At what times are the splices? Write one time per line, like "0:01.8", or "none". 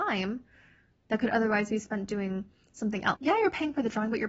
0:03.2